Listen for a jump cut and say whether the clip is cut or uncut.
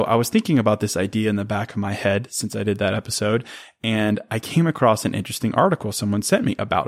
uncut